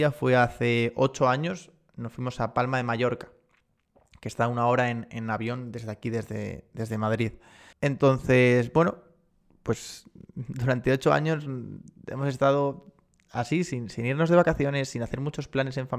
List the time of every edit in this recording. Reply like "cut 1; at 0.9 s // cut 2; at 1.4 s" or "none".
cut 1; at 7.7 s